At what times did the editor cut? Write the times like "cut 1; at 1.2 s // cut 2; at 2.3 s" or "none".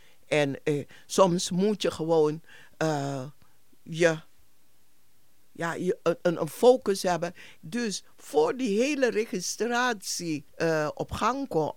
cut 1; at 7.6 s // cut 2; at 10.5 s